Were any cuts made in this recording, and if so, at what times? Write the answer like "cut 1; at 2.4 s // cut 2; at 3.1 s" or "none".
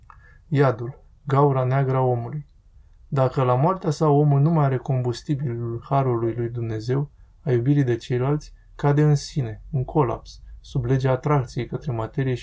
none